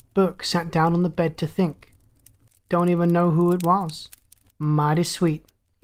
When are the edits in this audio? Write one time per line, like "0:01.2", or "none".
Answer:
0:02.5
0:04.5

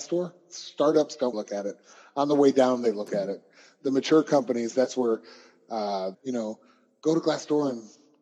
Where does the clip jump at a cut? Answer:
0:01.3
0:06.1

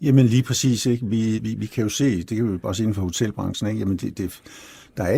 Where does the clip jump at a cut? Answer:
0:01.4

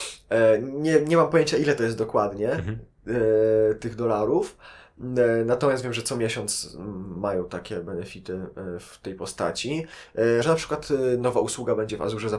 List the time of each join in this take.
0:10.4

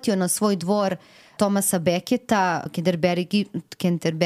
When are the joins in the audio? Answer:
0:01.4
0:02.7

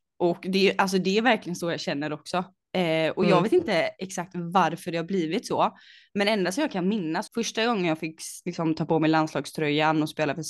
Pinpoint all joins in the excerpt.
0:07.3

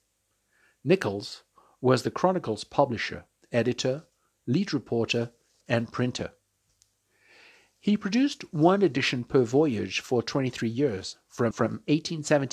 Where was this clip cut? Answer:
0:05.6
0:11.5

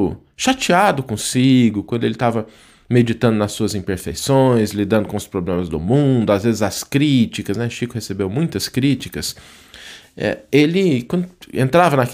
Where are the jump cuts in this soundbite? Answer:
none

